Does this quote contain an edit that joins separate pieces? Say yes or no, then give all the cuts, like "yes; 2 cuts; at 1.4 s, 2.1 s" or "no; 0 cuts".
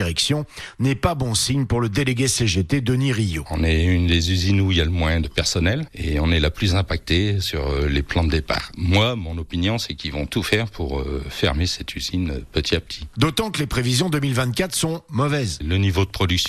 no; 0 cuts